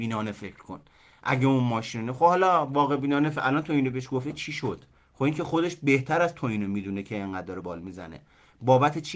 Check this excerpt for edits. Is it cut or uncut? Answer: cut